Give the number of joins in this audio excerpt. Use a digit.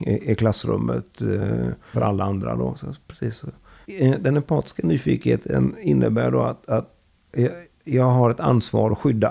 2